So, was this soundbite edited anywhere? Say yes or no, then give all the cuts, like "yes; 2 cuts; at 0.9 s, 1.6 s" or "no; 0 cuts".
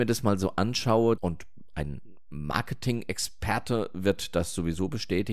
yes; 1 cut; at 1.2 s